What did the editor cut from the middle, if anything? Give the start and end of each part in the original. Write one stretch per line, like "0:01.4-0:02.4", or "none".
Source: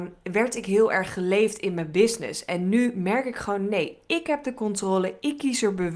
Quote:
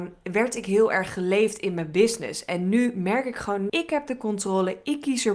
0:03.7-0:04.1